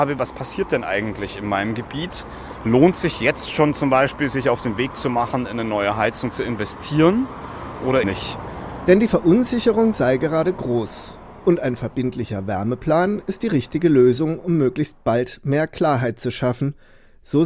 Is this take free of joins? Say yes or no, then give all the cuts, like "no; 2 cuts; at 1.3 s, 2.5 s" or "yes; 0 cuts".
no; 1 cut; at 8.0 s